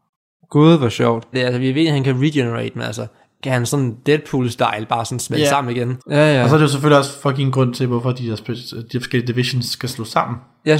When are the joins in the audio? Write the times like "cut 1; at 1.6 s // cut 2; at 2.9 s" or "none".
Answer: cut 1; at 1.3 s // cut 2; at 6.0 s